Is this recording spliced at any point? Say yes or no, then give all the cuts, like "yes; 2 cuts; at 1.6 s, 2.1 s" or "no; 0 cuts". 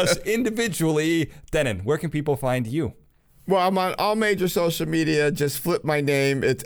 no; 0 cuts